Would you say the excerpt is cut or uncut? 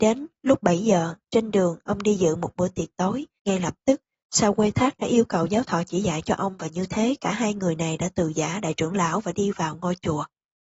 cut